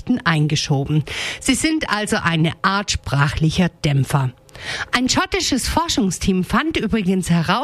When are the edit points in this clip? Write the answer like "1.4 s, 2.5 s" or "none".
none